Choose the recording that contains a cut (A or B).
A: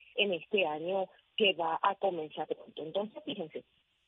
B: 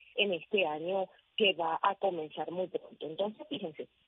A